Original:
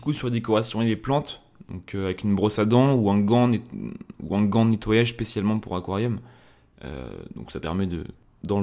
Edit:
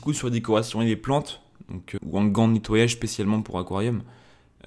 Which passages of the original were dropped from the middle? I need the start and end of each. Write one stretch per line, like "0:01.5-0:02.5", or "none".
0:02.0-0:04.1